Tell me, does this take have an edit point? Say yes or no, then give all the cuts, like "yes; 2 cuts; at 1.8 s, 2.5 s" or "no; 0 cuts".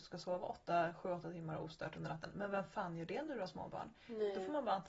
no; 0 cuts